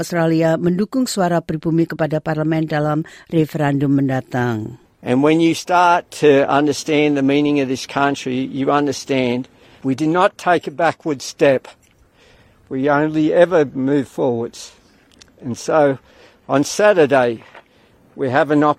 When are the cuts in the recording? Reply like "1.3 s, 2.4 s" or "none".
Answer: none